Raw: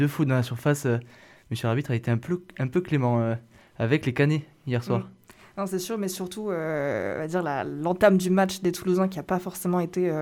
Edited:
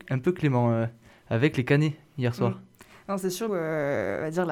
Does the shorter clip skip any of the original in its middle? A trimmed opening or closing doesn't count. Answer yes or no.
yes